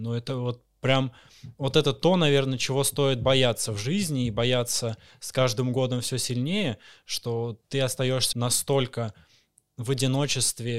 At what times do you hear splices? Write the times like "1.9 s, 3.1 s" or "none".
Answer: 8.3 s